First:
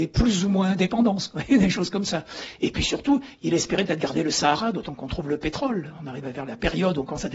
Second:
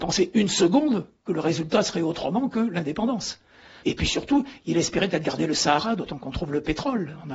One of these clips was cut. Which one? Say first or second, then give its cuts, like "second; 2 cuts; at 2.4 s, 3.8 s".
second; 1 cut; at 3.8 s